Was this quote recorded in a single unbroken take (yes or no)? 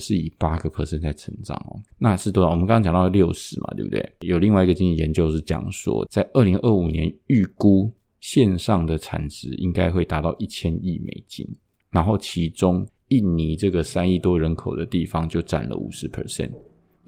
no